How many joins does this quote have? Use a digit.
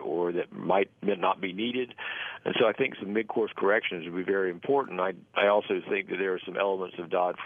0